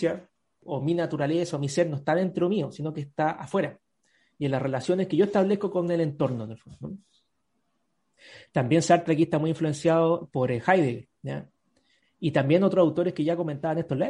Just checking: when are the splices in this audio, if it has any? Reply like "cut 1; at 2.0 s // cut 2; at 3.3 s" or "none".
none